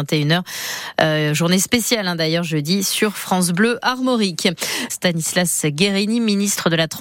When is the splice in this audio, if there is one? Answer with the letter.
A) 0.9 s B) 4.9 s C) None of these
B